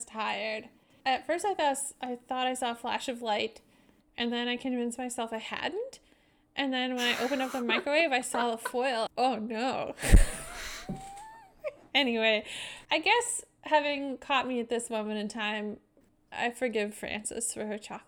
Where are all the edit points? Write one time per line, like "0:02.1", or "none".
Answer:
0:09.1
0:12.8